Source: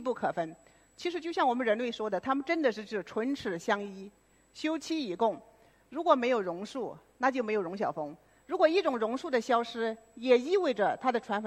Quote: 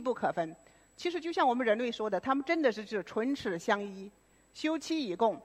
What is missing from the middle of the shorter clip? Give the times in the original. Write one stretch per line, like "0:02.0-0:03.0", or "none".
none

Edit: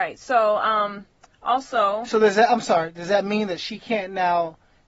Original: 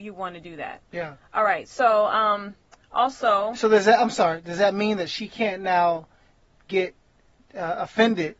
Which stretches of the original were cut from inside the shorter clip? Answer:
none

